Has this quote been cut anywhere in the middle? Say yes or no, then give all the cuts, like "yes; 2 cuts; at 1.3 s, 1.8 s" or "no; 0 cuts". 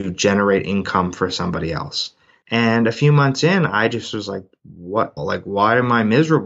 yes; 2 cuts; at 2.4 s, 5.2 s